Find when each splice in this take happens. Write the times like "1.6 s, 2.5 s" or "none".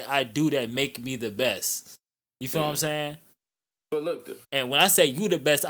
4.4 s